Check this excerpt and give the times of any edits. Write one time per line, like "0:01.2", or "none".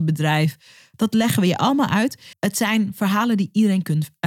0:00.9
0:02.3